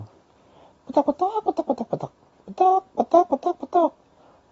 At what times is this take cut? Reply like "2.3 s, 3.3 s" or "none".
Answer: none